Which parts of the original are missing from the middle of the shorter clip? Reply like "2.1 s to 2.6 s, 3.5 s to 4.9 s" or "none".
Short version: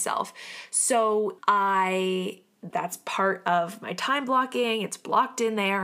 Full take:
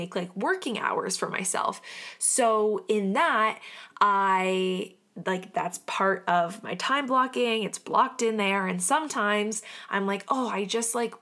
2.9 s to 3.9 s, 5.2 s to 5.5 s